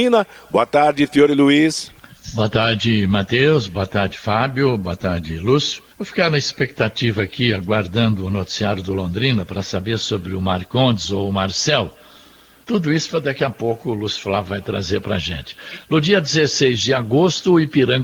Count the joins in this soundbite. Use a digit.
2